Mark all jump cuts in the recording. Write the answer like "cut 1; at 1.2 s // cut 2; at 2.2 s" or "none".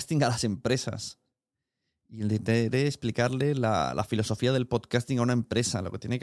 none